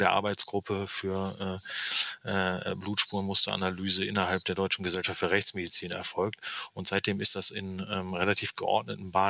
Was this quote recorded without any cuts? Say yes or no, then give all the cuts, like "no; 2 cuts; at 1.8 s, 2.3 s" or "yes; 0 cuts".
yes; 0 cuts